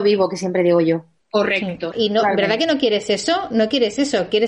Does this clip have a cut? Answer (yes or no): yes